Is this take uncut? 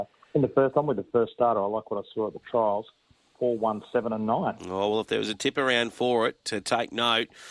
yes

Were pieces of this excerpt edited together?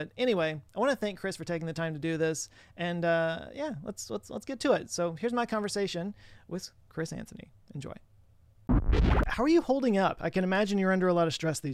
no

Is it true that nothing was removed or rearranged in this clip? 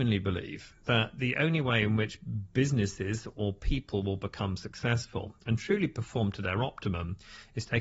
yes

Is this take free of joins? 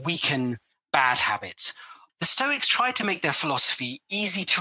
no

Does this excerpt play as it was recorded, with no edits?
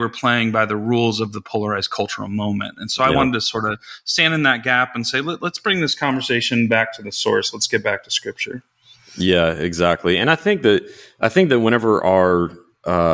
yes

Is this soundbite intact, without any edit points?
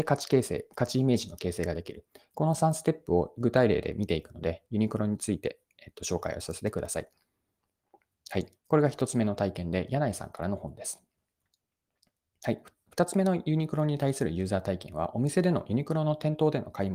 no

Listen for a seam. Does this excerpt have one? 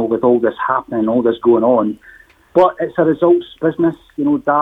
no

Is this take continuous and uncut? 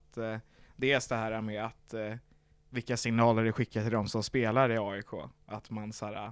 yes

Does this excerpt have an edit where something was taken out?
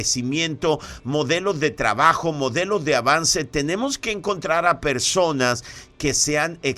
no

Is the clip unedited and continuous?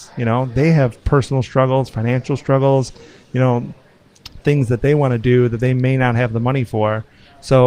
yes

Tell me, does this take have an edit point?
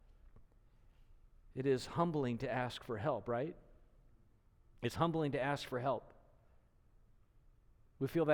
no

